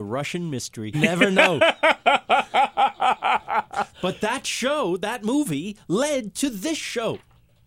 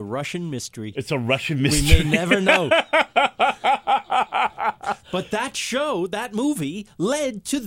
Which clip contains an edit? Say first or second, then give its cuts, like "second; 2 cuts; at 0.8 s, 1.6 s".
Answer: first; 1 cut; at 0.9 s